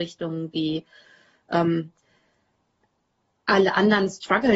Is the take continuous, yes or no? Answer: yes